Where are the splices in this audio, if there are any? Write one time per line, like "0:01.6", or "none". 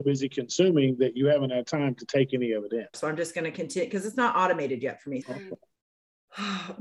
0:02.9
0:05.2